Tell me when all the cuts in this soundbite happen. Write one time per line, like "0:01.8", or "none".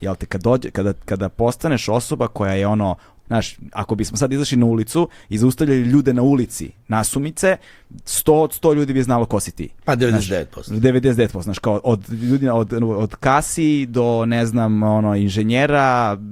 0:03.3